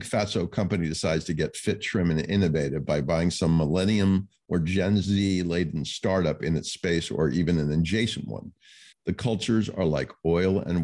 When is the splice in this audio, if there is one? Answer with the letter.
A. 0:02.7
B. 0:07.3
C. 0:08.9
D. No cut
C